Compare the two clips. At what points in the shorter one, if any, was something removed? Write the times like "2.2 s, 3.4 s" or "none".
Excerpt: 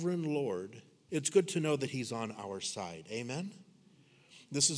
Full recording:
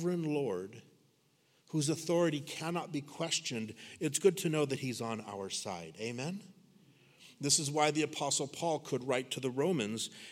1.1 s